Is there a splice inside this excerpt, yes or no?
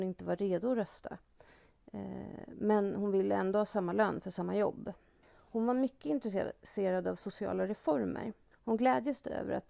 yes